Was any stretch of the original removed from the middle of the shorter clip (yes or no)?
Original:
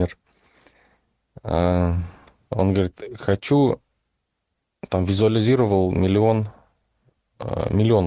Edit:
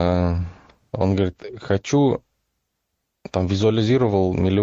no